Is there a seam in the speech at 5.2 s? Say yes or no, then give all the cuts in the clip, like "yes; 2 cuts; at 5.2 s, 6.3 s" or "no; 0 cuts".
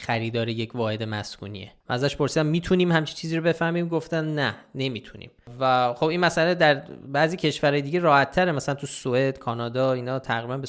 no; 1 cut; at 1.8 s